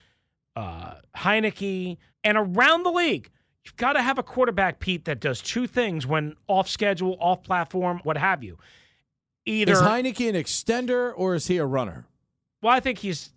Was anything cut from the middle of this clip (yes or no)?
yes